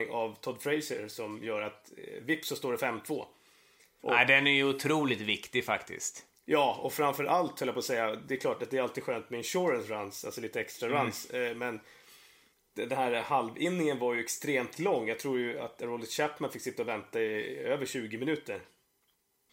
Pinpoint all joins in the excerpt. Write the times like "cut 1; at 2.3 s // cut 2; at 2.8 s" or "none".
cut 1; at 4.0 s